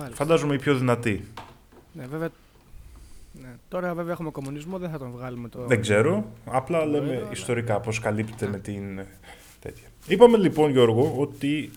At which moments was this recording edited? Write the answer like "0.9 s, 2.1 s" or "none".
none